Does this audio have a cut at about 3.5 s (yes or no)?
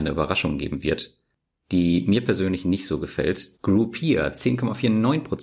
yes